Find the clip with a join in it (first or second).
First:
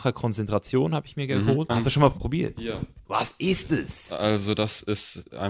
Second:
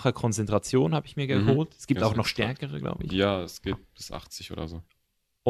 first